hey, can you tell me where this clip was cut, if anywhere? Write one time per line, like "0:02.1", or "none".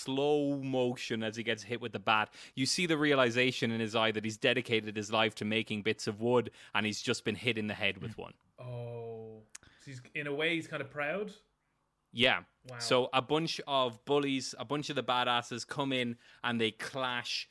none